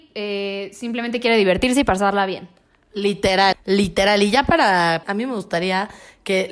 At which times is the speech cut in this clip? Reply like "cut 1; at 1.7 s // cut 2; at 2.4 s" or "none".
cut 1; at 3.5 s // cut 2; at 5.0 s